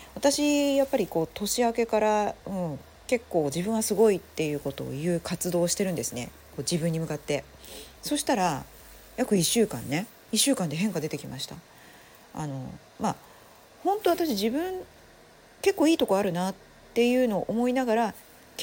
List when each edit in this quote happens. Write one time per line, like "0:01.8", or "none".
0:08.0

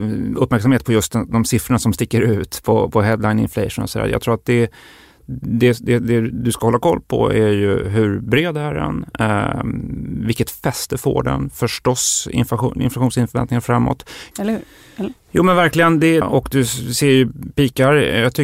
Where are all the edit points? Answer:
0:14.3
0:16.2

